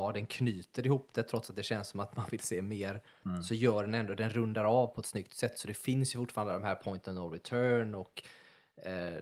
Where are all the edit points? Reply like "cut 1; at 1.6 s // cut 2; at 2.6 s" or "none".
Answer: none